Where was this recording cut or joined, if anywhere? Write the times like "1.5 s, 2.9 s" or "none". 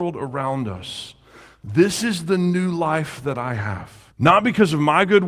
4.1 s

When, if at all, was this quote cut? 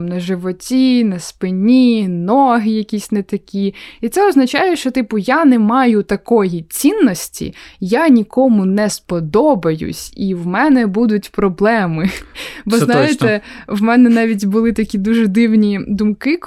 none

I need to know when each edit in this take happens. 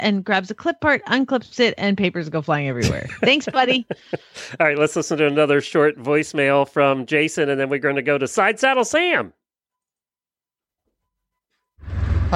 none

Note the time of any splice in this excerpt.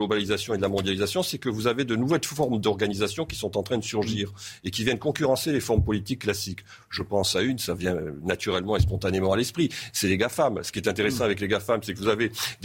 none

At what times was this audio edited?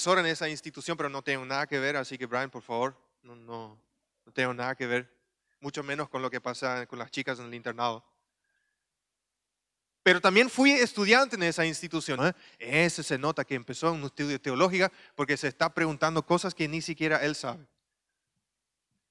12.2 s

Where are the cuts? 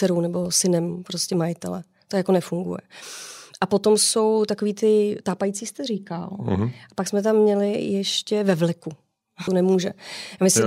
9.5 s

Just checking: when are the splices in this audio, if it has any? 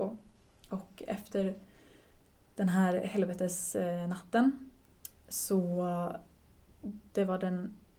none

